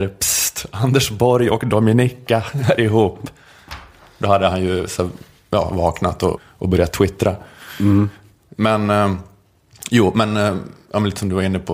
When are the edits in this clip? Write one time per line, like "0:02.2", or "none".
0:06.4